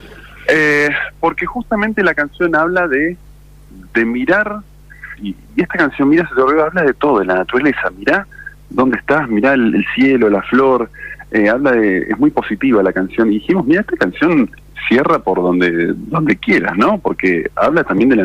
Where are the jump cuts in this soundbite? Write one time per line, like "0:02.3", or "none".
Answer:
0:05.2

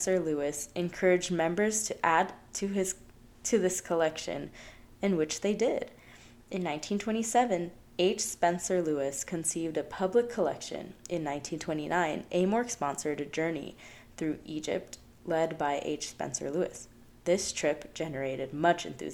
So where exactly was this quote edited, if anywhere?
none

